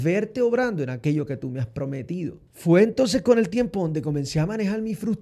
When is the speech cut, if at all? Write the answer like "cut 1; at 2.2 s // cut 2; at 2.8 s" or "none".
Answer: cut 1; at 2.5 s